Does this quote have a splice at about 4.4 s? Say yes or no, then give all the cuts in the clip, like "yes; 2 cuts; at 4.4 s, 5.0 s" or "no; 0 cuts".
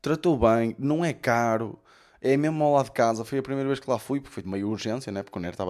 yes; 1 cut; at 4.4 s